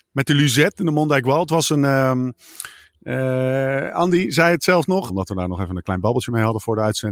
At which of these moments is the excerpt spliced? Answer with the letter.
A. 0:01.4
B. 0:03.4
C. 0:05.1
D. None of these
C